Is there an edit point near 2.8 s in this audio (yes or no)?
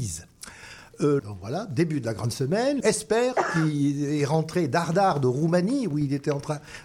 yes